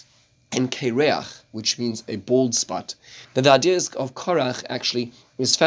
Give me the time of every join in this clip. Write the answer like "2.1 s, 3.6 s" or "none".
3.2 s